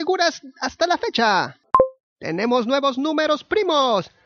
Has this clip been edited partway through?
no; 0 cuts

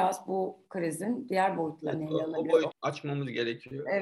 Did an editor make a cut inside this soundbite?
yes; 1 cut; at 2.7 s

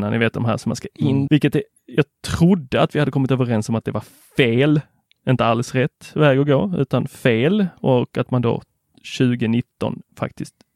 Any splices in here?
yes; 1 cut; at 1.3 s

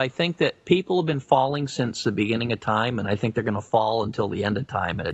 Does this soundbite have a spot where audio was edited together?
no; 0 cuts

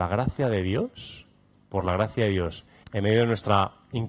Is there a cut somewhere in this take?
yes; 1 cut; at 2.8 s

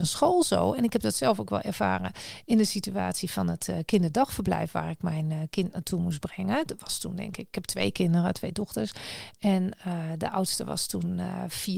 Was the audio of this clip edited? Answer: no; 0 cuts

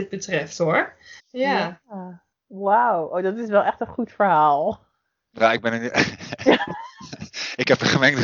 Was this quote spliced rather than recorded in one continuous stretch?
yes; 1 cut; at 1.2 s

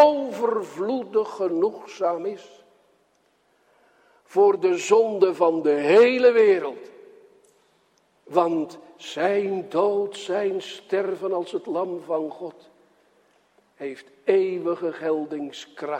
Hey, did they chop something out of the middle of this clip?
yes; 1 cut; at 8.1 s

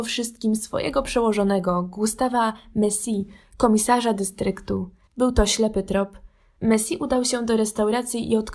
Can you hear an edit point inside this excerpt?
yes; 2 cuts; at 5.1 s, 6.6 s

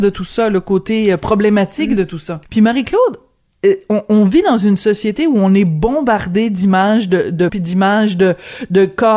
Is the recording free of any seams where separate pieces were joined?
no; 2 cuts; at 2.4 s, 7.5 s

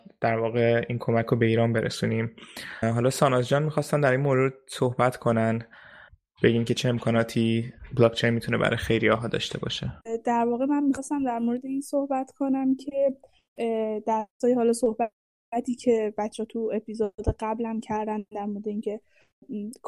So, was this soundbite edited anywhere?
no; 0 cuts

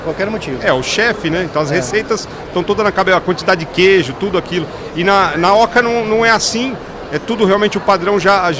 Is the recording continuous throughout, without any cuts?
yes; 0 cuts

